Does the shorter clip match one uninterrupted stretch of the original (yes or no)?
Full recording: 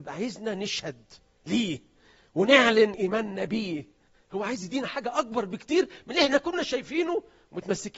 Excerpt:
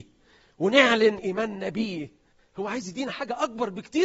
yes